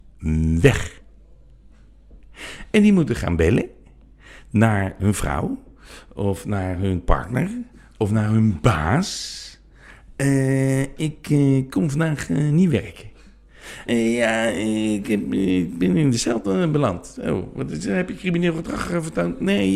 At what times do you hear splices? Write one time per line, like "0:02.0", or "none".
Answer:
0:13.9